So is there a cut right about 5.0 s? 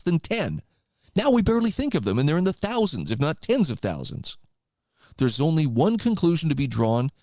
no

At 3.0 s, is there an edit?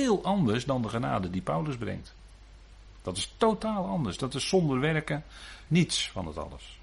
no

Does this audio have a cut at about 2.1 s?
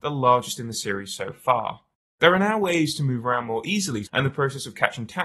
no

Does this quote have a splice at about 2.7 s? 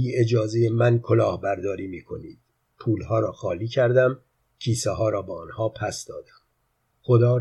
yes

